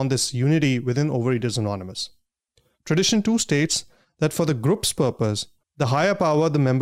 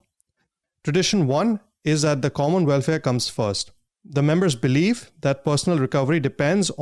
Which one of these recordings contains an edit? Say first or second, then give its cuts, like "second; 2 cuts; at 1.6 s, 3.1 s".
first; 1 cut; at 5.6 s